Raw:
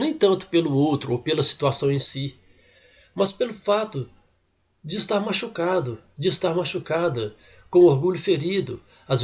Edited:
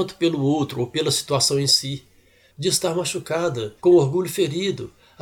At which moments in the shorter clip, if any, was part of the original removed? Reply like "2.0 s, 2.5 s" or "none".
2.5 s, 3.8 s